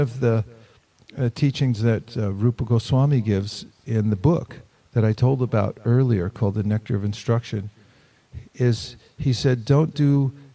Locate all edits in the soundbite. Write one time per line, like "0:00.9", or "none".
none